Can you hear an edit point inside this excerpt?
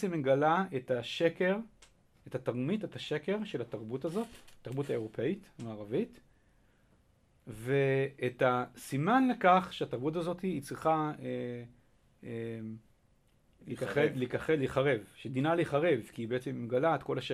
no; 0 cuts

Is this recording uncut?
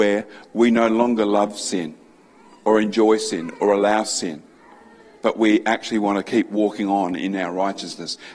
yes; 0 cuts

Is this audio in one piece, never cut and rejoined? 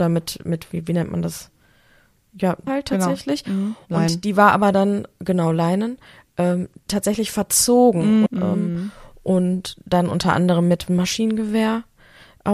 no; 3 cuts; at 2.7 s, 8.3 s, 10.9 s

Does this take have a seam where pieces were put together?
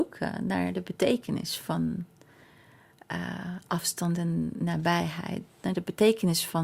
no; 0 cuts

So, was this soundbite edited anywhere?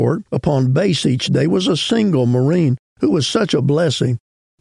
no; 0 cuts

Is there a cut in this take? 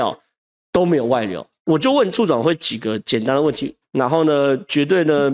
yes; 2 cuts; at 1.6 s, 3.8 s

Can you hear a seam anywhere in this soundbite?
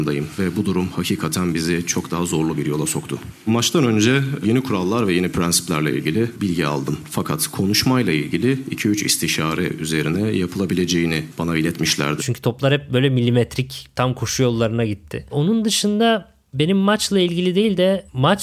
yes; 2 cuts; at 12.2 s, 15.2 s

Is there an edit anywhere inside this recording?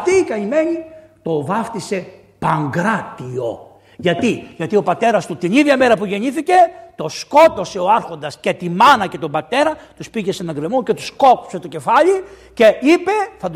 no; 0 cuts

